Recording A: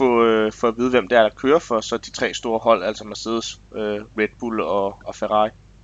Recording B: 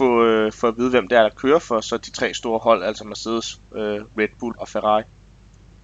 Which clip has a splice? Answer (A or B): B